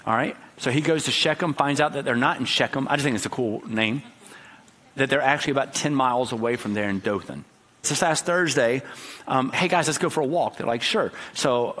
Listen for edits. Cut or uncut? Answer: cut